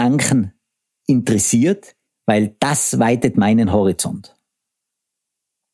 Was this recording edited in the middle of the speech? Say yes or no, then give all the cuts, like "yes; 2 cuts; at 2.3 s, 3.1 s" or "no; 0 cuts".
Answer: yes; 1 cut; at 2.1 s